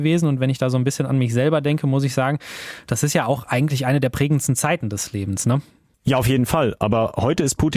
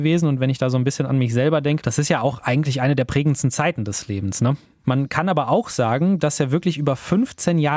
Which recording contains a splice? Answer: second; 2 cuts; at 1.8 s, 4.8 s

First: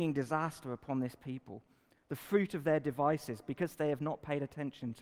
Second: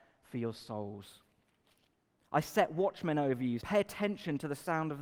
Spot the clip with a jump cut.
second; 2 cuts; at 2.2 s, 3.6 s

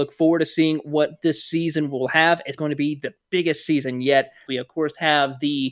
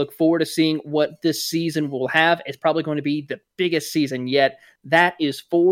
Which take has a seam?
first; 2 cuts; at 2.6 s, 4.5 s

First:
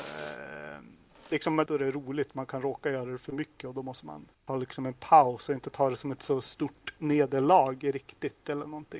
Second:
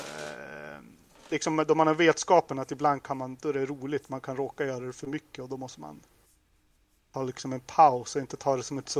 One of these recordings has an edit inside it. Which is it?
first; 2 cuts; at 1.7 s, 4.3 s

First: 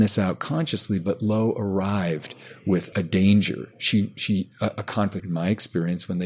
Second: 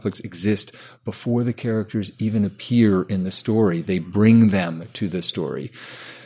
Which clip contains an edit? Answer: first; 2 cuts; at 2.9 s, 5.2 s

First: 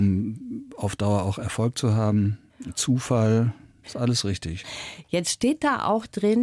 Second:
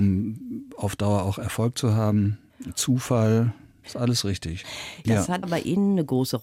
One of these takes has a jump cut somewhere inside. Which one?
second; 1 cut; at 5.0 s

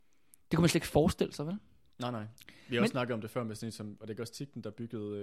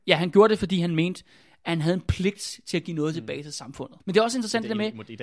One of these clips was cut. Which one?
second; 1 cut; at 4.0 s

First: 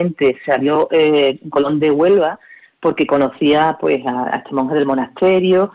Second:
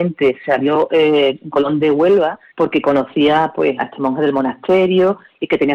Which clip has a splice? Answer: second; 2 cuts; at 2.5 s, 3.8 s

